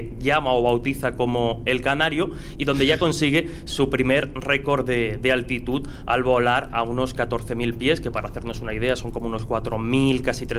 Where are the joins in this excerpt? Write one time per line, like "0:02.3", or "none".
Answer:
none

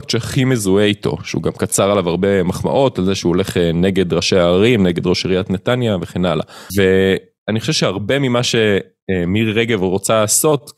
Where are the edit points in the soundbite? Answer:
0:06.7

